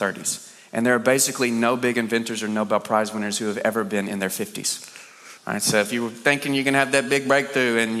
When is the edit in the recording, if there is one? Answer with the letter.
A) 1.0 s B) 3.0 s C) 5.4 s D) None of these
D